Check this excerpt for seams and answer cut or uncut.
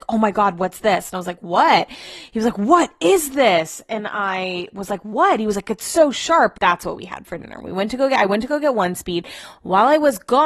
cut